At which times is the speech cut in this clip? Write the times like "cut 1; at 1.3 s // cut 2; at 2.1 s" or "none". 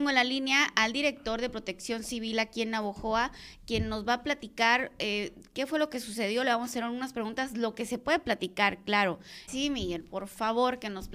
cut 1; at 9.5 s